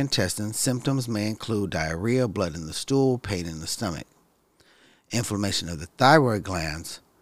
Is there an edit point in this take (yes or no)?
no